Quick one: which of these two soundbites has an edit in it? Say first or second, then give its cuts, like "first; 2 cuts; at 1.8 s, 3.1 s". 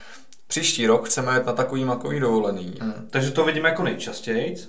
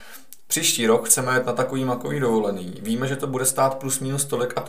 first; 1 cut; at 2.8 s